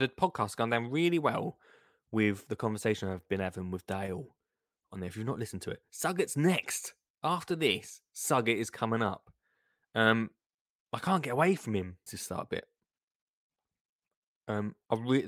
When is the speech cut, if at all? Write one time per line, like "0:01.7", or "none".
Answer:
0:12.1